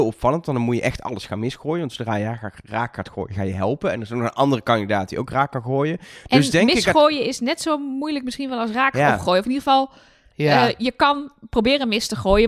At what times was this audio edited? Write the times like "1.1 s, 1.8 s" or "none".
none